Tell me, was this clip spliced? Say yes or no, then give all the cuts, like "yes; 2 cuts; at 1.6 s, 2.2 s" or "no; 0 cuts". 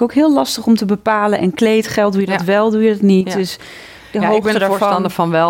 no; 0 cuts